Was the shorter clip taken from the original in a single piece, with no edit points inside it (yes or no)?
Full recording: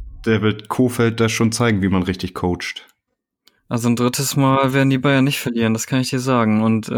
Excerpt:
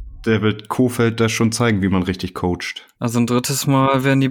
no